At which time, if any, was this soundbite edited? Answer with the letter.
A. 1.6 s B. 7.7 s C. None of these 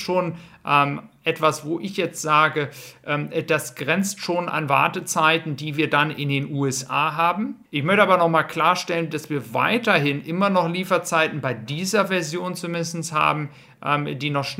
B